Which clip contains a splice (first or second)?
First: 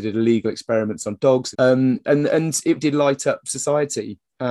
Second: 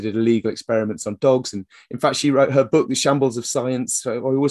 first